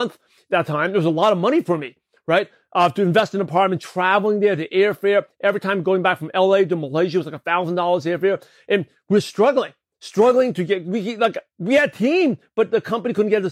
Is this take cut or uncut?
uncut